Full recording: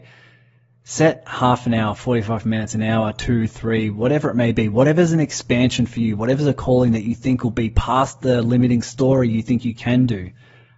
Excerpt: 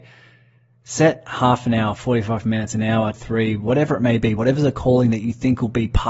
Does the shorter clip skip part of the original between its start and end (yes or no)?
yes